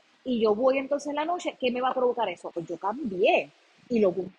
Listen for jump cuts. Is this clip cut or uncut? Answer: cut